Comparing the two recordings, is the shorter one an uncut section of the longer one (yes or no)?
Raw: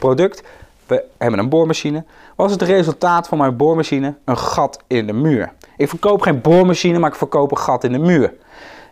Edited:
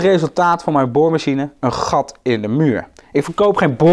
yes